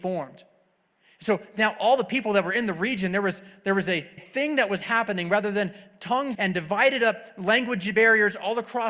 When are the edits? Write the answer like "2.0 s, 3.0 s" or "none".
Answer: 4.2 s, 6.3 s